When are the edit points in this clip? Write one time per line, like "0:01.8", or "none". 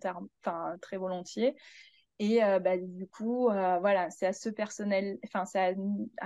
none